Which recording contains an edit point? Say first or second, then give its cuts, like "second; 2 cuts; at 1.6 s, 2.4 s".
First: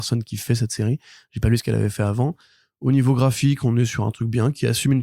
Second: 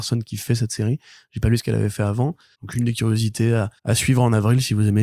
second; 2 cuts; at 2.5 s, 3.8 s